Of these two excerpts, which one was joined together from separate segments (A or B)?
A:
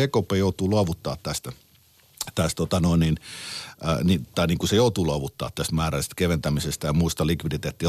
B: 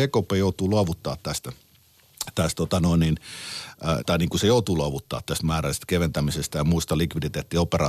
B